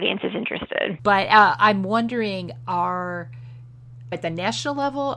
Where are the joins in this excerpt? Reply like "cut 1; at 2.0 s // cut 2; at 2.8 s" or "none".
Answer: cut 1; at 1.0 s // cut 2; at 4.1 s